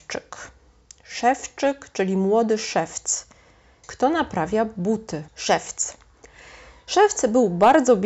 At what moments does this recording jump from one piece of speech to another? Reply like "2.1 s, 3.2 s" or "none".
3.8 s, 5.3 s